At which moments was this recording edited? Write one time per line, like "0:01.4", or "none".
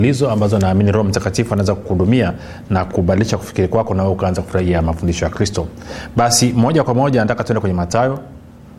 none